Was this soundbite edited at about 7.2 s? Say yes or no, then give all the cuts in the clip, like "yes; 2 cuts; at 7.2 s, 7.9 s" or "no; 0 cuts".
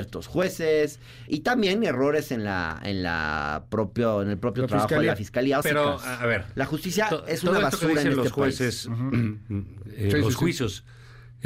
no; 2 cuts; at 1.3 s, 5.6 s